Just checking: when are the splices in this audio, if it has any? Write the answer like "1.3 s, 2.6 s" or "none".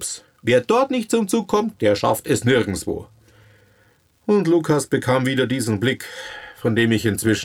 none